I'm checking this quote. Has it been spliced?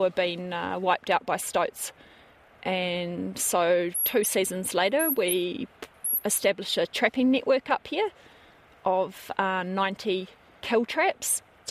no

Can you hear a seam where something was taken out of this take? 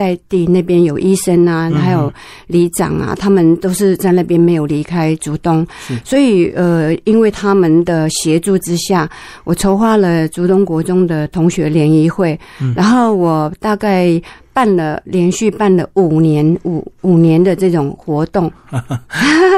no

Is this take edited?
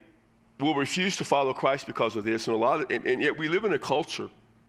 no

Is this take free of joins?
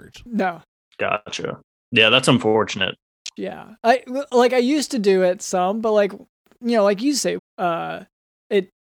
no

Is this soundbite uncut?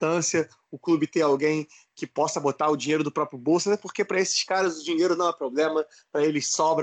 yes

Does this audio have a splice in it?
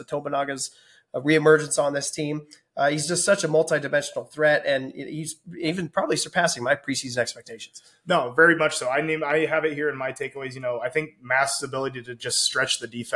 no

